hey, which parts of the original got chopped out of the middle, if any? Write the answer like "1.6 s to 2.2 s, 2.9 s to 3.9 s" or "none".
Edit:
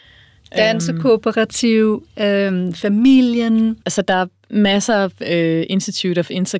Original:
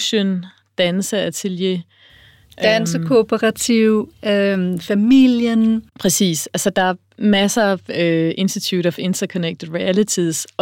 5.9 s to 6.5 s